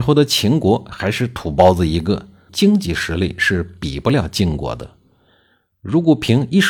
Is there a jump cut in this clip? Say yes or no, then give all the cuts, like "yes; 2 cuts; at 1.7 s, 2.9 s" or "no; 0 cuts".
yes; 2 cuts; at 2.5 s, 5.7 s